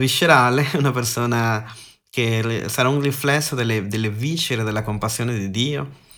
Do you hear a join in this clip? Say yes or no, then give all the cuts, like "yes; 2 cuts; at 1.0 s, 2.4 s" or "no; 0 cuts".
no; 0 cuts